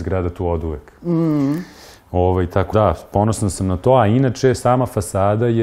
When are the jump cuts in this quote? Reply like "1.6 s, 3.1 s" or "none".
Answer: 2.7 s